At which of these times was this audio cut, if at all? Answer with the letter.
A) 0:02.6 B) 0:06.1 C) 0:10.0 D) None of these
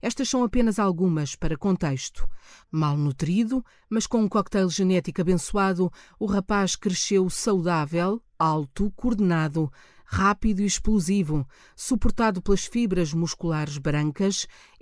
A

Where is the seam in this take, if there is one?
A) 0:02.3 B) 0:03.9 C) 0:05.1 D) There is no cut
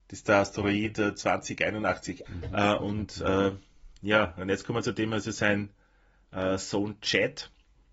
A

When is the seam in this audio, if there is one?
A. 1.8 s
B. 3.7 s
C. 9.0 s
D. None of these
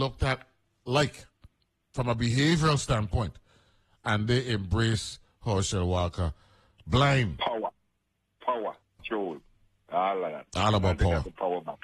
C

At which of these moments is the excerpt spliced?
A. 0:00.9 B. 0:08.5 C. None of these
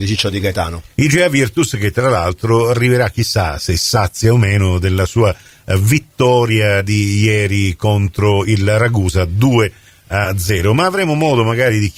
A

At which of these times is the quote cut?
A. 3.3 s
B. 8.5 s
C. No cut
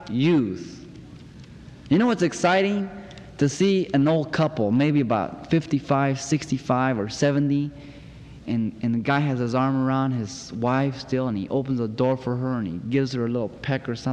B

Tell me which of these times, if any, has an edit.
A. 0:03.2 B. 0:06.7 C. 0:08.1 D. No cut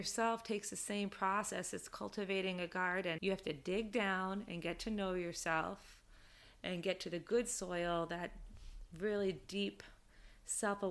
A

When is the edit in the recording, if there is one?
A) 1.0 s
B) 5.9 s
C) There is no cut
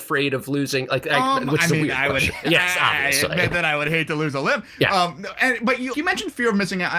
B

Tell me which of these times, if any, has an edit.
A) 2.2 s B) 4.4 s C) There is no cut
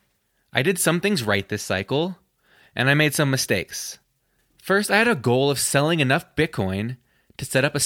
B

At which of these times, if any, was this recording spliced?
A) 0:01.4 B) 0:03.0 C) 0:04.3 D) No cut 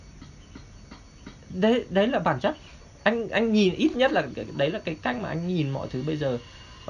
C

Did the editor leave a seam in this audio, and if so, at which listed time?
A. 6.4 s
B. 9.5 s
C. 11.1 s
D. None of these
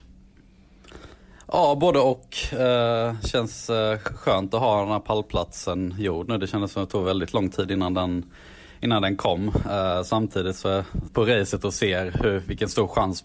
C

